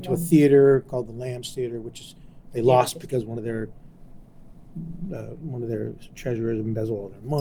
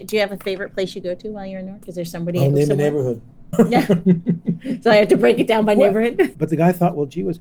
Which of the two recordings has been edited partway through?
second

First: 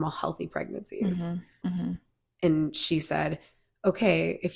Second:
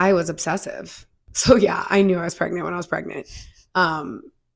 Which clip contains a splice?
first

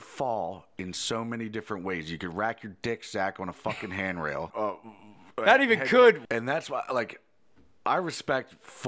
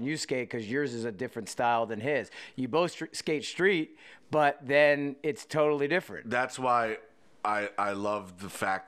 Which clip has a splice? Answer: first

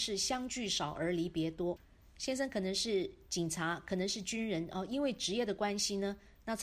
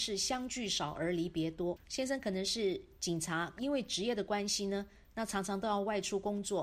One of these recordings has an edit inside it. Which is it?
second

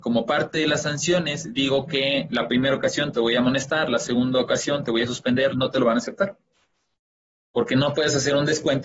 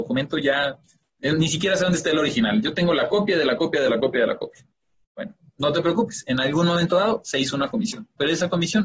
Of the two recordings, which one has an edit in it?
first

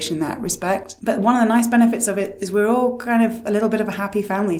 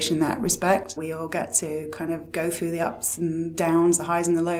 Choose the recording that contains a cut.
second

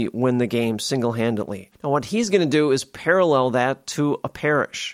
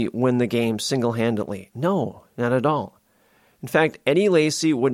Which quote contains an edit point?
first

